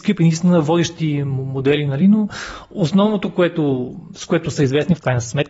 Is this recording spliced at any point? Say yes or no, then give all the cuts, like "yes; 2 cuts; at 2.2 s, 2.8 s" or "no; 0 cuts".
no; 0 cuts